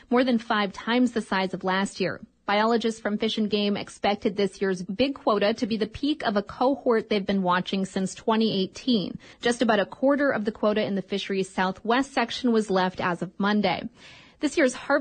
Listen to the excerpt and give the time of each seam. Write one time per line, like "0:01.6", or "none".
0:09.3